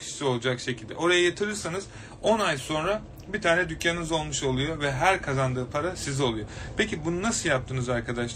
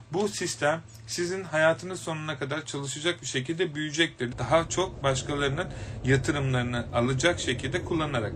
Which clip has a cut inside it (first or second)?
second